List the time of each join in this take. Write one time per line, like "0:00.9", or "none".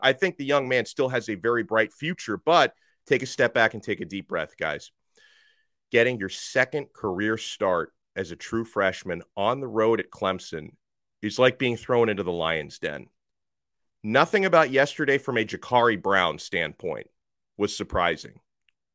0:02.9